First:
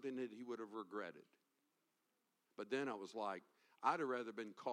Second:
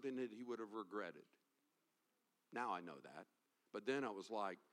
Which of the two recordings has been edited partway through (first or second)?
first